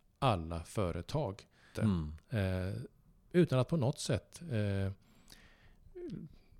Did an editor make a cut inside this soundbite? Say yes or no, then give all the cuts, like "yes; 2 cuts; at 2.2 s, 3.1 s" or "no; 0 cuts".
yes; 1 cut; at 1.7 s